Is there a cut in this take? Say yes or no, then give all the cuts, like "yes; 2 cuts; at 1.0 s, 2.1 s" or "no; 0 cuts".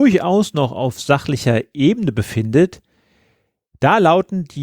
no; 0 cuts